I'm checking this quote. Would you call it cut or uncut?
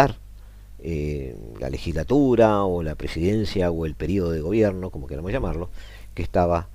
uncut